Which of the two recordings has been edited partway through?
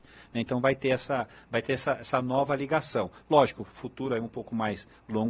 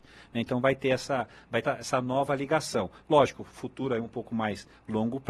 second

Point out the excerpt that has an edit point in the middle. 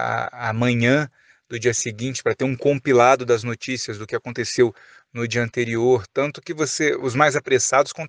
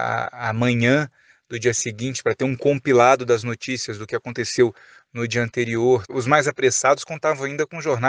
second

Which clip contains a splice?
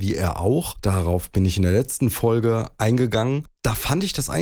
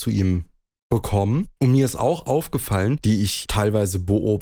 second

